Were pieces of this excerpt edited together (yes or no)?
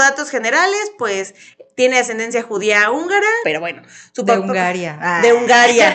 yes